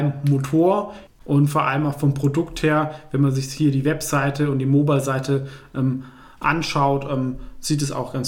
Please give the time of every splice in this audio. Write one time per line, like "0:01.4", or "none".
0:01.1